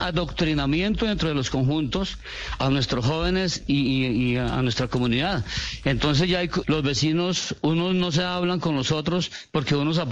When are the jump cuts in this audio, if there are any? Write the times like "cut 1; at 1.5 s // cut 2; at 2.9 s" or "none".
cut 1; at 6.6 s

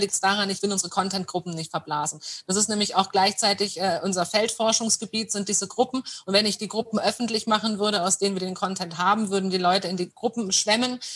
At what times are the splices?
none

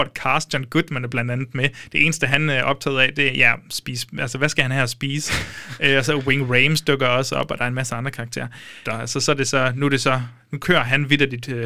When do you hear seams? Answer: cut 1; at 8.8 s

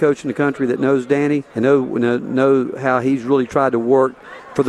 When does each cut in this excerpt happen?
cut 1; at 1.5 s

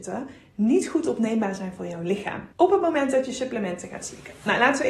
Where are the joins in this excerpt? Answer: cut 1; at 2.5 s

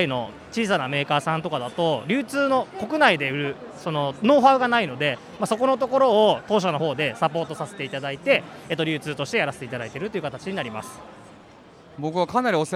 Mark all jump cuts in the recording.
none

